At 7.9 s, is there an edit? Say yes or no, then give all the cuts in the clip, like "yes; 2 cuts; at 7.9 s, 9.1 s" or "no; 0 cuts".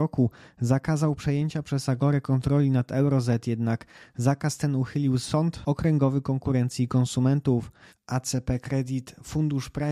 yes; 1 cut; at 7.9 s